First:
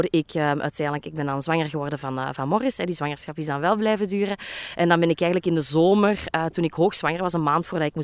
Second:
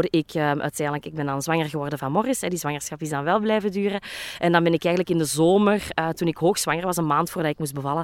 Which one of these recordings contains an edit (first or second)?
second